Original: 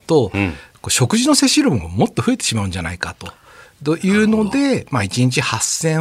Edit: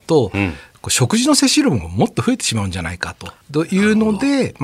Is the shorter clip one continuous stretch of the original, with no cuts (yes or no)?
no